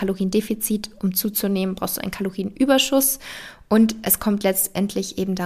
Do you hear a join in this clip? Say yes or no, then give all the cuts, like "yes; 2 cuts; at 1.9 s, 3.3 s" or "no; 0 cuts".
no; 0 cuts